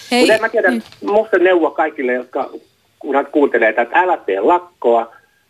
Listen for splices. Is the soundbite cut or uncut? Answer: cut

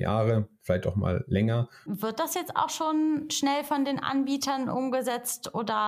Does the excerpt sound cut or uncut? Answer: cut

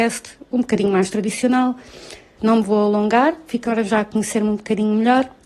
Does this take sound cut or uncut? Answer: cut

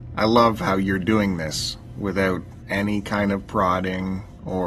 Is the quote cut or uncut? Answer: cut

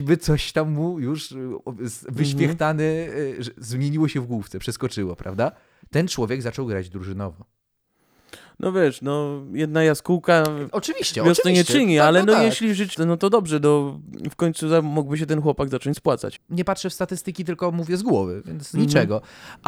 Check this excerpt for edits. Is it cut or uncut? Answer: cut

